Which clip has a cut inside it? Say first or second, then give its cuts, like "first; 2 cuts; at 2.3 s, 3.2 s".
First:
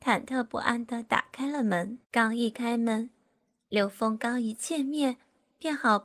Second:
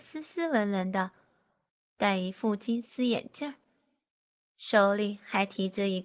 first; 1 cut; at 2.0 s